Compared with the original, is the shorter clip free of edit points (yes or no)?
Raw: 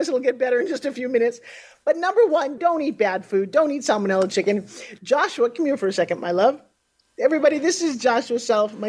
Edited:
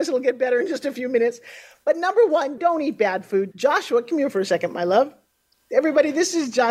no